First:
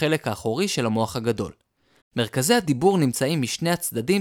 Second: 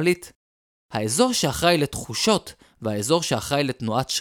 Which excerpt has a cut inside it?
first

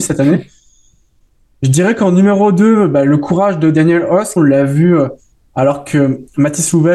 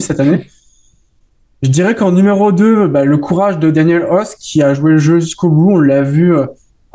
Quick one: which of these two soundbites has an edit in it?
first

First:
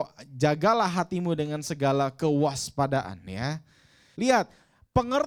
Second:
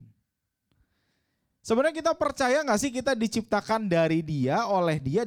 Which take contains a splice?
first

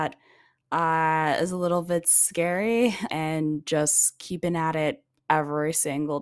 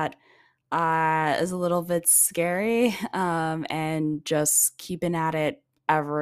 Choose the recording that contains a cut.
first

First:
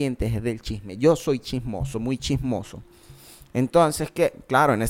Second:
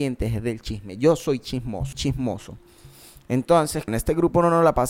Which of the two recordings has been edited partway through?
second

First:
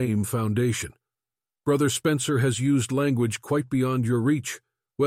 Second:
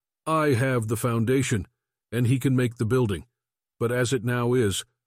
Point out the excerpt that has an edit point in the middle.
second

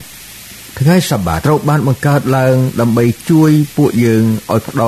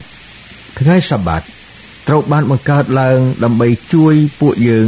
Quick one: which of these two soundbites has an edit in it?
first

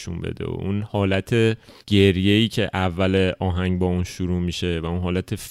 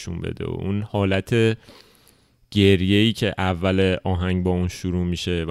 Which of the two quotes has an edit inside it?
first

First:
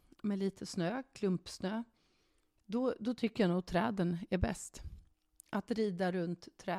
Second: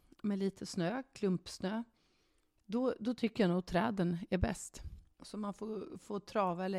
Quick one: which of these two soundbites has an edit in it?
second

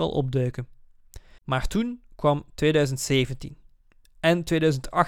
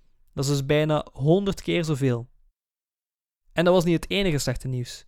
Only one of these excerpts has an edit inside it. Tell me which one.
first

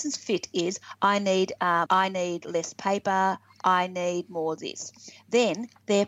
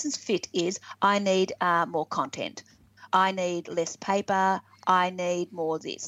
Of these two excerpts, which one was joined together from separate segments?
first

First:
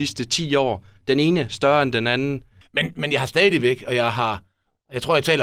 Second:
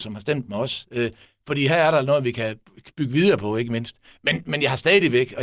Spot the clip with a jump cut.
first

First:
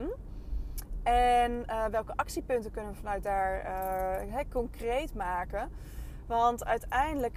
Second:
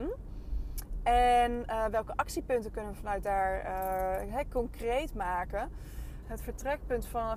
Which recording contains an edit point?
second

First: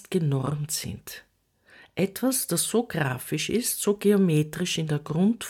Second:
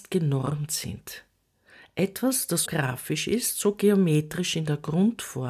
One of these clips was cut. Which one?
second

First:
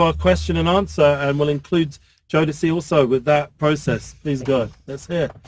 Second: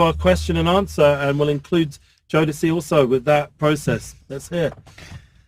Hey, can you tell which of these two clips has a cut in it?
second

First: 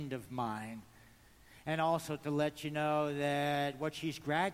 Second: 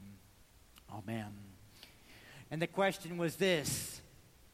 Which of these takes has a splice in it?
second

